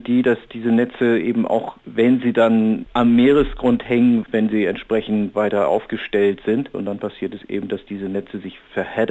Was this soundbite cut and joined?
yes; 2 cuts; at 4.2 s, 6.7 s

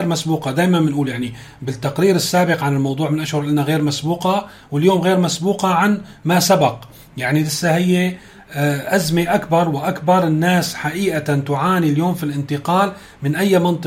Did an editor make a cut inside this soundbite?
no; 0 cuts

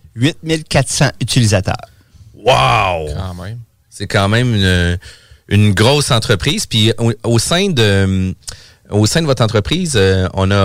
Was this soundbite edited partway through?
no; 0 cuts

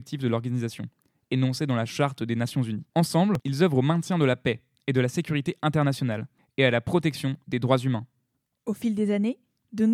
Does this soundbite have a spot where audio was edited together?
yes; 1 cut; at 2.9 s

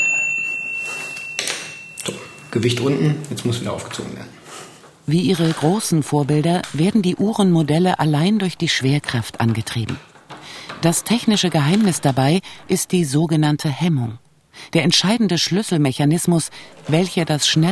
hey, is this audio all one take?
yes; 0 cuts

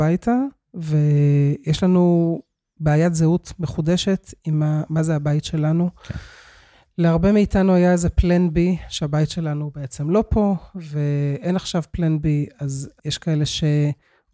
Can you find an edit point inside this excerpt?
no; 0 cuts

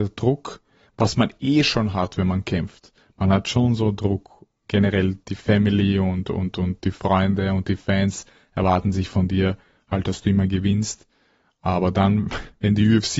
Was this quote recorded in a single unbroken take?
yes; 0 cuts

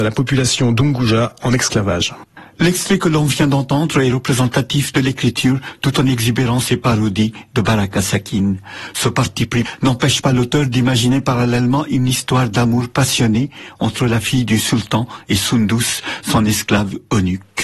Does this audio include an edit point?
no; 0 cuts

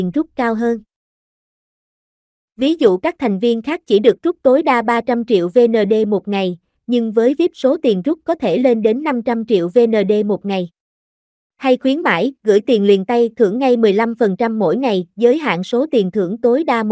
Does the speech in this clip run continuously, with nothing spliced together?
yes; 0 cuts

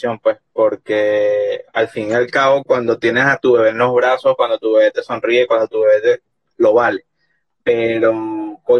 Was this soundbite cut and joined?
no; 0 cuts

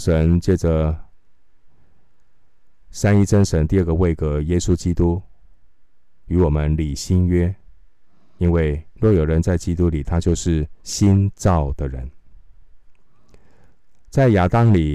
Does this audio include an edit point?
yes; 2 cuts; at 8.4 s, 10.8 s

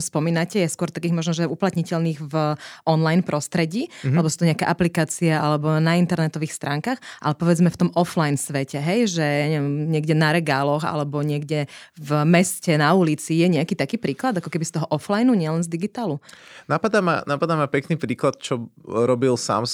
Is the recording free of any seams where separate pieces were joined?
yes; 0 cuts

